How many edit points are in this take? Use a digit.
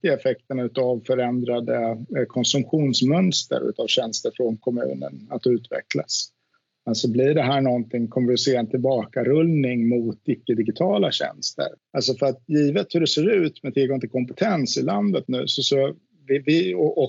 1